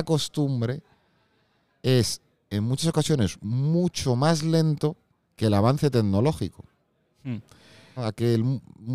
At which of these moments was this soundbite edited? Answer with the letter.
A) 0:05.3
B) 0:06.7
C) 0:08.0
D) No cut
C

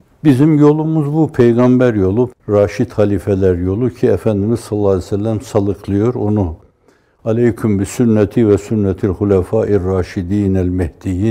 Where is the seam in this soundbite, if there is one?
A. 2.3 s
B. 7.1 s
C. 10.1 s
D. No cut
A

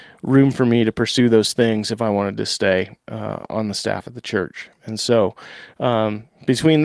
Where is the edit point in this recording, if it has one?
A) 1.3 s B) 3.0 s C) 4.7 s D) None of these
D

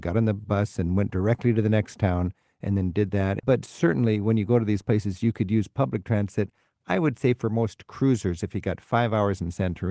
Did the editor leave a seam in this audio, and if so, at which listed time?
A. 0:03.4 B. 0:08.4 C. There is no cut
A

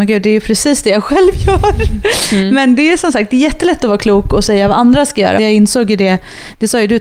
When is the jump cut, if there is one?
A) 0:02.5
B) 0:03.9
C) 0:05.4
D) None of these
C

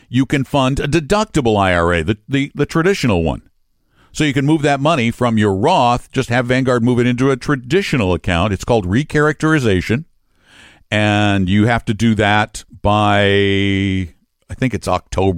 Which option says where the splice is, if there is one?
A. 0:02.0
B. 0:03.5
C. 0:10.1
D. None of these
D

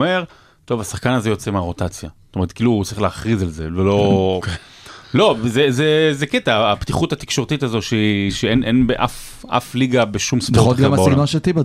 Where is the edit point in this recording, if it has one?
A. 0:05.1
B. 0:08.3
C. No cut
C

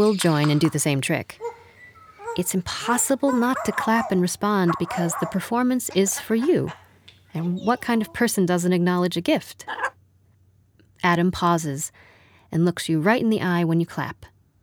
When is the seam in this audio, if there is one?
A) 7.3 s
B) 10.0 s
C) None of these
C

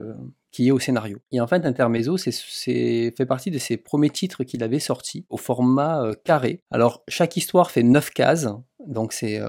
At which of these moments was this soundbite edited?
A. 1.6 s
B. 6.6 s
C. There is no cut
B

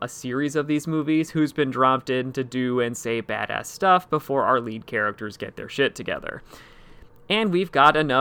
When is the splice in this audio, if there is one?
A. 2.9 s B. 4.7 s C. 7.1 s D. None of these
D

